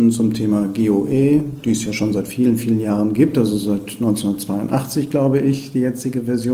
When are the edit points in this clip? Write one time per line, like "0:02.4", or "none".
none